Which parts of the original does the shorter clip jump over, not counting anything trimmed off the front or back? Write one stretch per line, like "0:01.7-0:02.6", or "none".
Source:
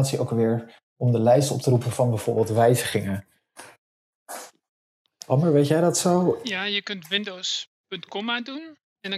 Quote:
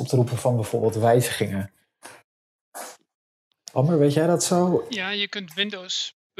none